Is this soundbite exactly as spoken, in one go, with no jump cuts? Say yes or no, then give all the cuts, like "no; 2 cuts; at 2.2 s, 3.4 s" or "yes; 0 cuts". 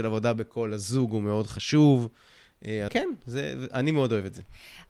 no; 1 cut; at 2.9 s